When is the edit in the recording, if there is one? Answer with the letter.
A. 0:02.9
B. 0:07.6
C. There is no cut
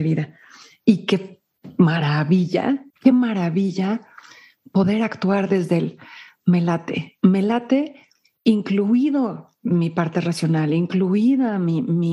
A